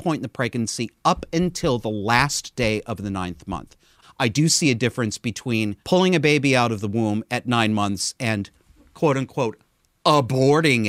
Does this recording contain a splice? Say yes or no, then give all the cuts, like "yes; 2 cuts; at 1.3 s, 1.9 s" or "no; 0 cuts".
yes; 2 cuts; at 4.0 s, 5.8 s